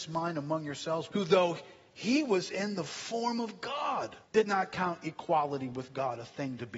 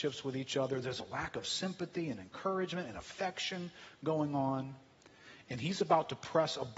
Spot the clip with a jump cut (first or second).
first